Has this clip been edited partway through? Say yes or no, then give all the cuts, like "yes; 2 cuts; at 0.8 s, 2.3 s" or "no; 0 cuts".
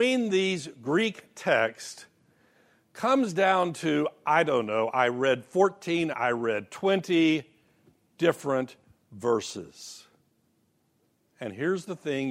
yes; 1 cut; at 6.1 s